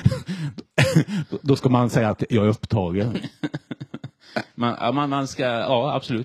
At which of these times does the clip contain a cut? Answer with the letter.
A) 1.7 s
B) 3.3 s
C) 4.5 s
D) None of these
D